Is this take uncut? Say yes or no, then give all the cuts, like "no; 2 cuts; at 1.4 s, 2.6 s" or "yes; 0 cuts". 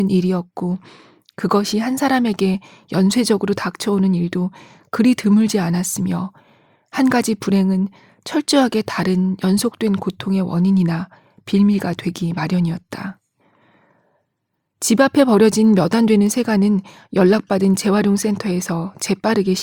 yes; 0 cuts